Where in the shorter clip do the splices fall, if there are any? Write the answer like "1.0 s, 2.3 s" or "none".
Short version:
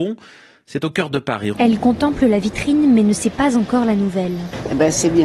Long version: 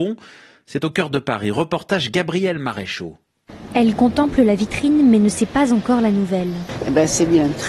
1.5 s